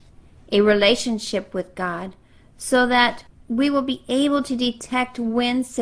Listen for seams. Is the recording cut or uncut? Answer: uncut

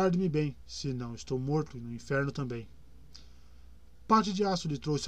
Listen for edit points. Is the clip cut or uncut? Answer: uncut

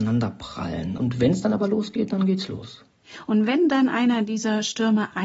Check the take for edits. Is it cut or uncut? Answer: cut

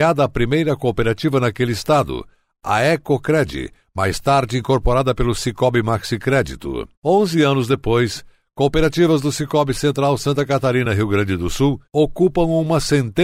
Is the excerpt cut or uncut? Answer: uncut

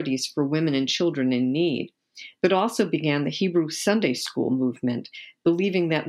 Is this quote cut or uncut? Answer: uncut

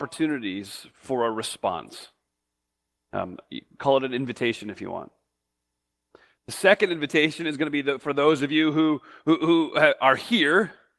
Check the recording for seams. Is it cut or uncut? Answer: cut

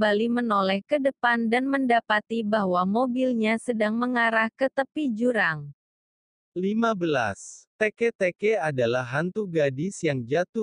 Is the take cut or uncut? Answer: cut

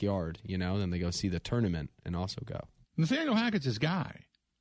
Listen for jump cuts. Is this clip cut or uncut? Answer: cut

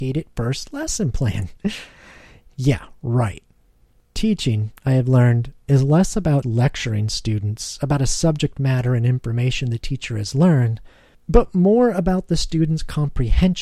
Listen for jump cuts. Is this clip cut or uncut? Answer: cut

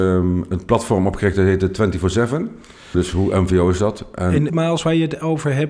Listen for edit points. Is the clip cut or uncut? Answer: cut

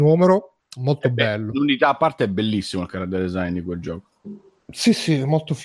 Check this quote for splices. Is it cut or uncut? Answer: uncut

